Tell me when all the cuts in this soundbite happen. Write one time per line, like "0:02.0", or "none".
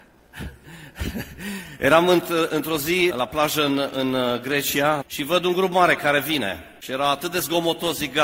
0:03.1
0:05.0